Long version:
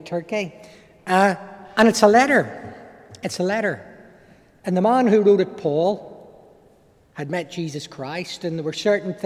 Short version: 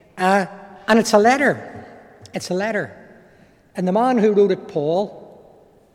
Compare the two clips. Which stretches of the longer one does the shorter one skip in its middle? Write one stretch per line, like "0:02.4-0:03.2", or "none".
none